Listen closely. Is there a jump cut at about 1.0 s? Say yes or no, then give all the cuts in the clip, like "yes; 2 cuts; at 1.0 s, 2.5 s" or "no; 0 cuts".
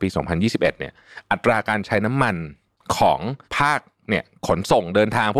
no; 1 cut; at 3.4 s